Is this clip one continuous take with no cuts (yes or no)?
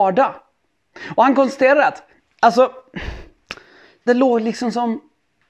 no